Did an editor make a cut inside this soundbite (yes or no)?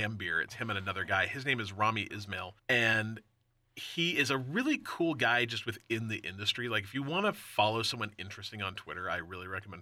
yes